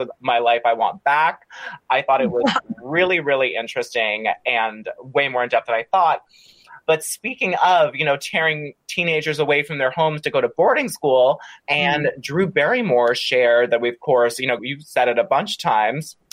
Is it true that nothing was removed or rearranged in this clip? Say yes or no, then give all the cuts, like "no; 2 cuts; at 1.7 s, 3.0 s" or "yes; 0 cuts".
no; 2 cuts; at 11.6 s, 14.6 s